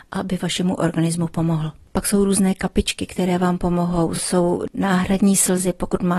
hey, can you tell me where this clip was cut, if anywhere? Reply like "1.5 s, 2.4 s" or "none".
none